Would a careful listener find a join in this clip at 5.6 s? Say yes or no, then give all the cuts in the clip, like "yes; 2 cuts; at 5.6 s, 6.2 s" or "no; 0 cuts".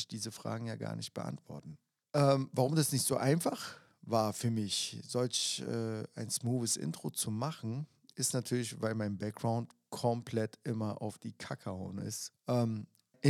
no; 2 cuts; at 2.0 s, 12.3 s